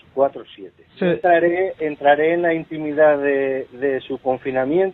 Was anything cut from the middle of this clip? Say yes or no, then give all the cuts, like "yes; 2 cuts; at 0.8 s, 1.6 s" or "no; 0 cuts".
yes; 1 cut; at 1.0 s